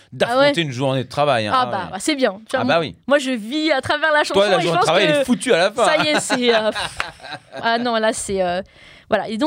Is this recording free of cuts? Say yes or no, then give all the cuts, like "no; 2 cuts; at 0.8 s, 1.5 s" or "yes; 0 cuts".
yes; 0 cuts